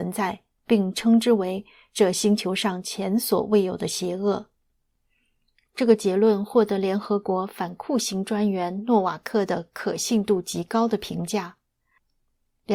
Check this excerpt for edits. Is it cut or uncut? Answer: uncut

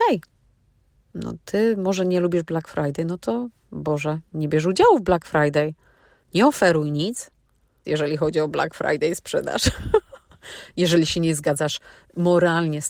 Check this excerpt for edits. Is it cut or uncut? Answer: cut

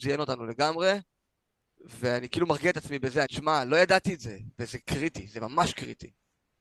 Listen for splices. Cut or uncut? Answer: cut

